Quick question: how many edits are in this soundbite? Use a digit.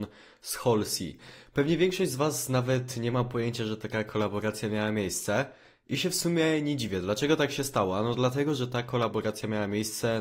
0